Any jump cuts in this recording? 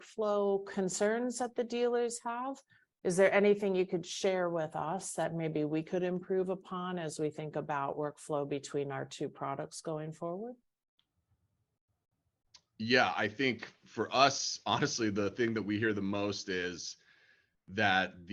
no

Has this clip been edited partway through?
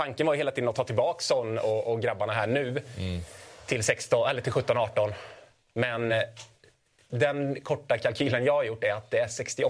no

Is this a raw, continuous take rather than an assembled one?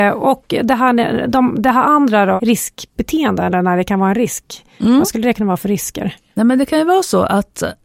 yes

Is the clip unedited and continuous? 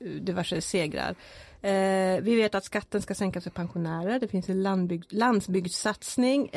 yes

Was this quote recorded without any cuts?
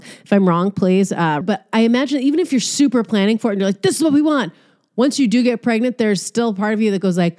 no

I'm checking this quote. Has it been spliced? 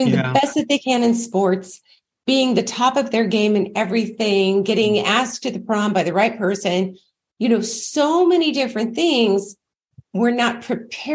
no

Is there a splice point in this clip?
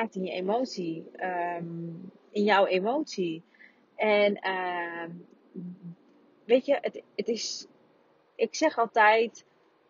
no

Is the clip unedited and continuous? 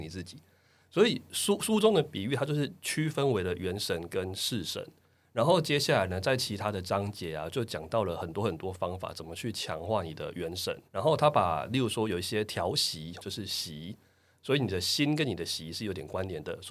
no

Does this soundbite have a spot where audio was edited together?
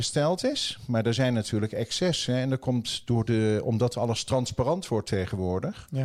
no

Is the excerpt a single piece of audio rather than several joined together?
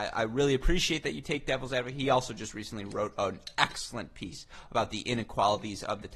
yes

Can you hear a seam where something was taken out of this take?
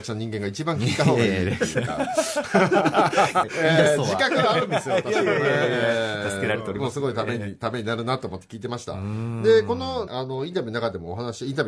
yes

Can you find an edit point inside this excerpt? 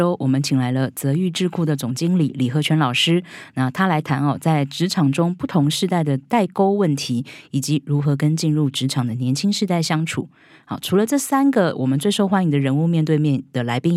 no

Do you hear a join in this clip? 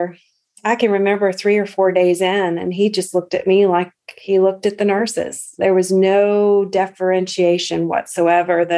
no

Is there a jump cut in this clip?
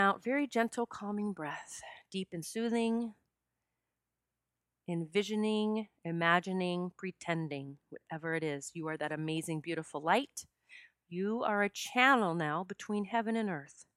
no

